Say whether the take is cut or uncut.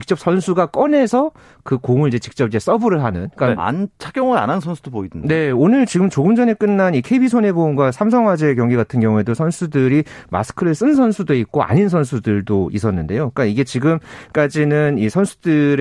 cut